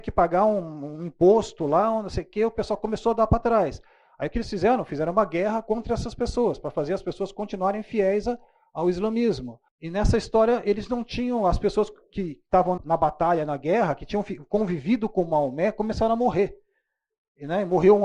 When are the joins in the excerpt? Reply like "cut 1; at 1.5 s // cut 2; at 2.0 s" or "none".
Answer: cut 1; at 9.7 s // cut 2; at 12.8 s